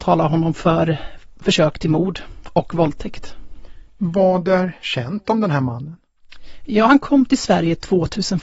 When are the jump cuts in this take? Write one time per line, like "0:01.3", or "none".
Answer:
0:03.9